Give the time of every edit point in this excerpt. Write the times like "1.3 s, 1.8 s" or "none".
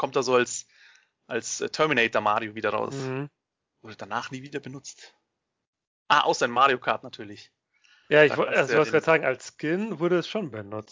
none